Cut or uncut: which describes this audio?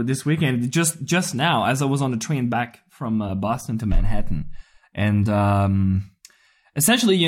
uncut